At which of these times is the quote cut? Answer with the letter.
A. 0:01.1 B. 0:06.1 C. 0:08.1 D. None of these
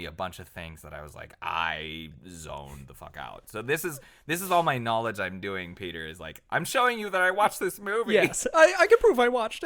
D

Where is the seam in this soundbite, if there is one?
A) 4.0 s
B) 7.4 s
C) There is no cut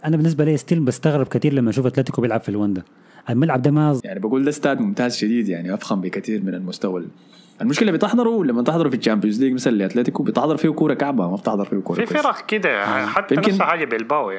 A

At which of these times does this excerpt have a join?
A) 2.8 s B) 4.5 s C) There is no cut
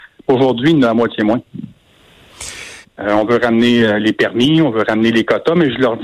A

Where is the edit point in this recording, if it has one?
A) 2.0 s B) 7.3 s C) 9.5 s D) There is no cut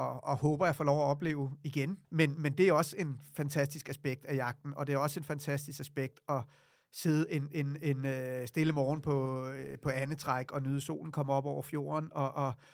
A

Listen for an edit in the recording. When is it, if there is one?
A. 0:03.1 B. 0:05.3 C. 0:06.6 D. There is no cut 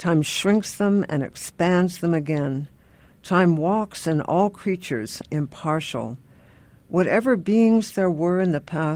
B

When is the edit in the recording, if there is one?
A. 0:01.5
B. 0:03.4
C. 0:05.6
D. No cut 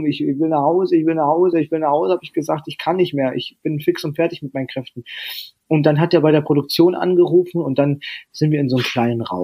D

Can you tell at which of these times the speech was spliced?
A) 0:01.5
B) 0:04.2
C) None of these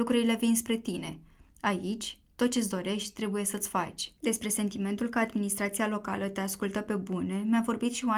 B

